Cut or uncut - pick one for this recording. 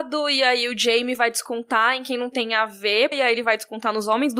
cut